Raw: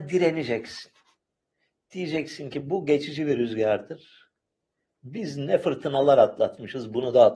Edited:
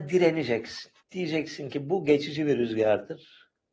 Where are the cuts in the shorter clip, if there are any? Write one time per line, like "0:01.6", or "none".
0:01.0